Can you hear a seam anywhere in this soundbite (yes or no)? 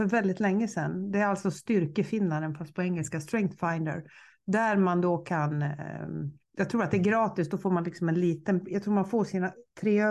no